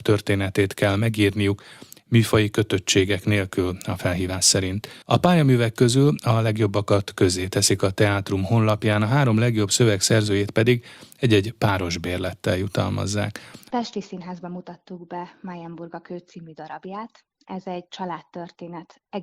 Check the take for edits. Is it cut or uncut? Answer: cut